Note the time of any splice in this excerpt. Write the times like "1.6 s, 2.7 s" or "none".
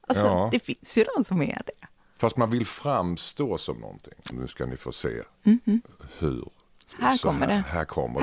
4.3 s, 6.9 s